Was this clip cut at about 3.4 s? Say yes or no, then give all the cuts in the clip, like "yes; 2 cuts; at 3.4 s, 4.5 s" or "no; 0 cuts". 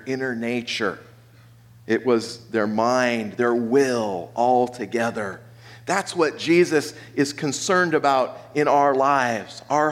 yes; 1 cut; at 3.4 s